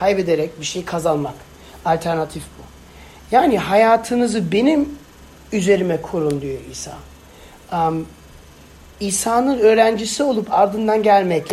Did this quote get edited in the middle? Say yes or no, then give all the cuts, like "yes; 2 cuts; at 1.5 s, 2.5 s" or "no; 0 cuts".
no; 0 cuts